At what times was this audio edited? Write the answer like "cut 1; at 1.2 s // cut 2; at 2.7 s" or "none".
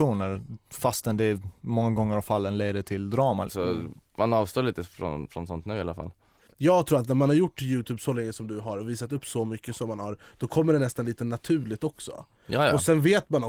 cut 1; at 3.5 s